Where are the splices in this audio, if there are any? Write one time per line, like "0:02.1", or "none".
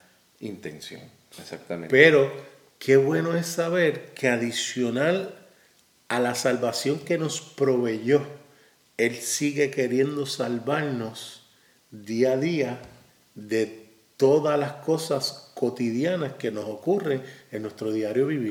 0:01.3